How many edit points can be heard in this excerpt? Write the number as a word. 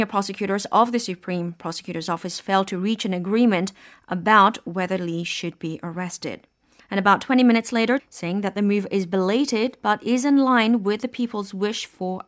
two